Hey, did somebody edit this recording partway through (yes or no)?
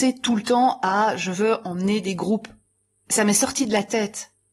no